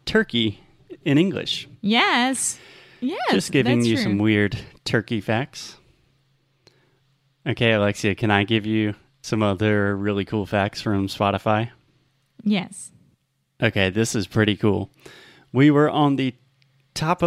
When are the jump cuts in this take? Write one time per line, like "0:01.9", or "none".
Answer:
none

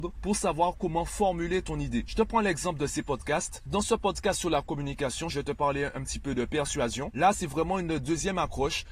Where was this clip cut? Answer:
0:05.3
0:07.1

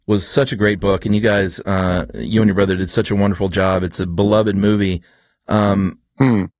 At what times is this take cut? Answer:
none

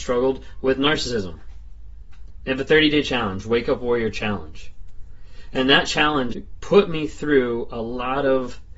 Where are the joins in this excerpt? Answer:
0:02.5
0:06.3

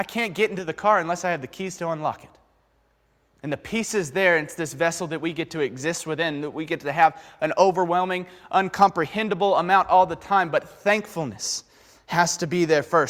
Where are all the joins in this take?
none

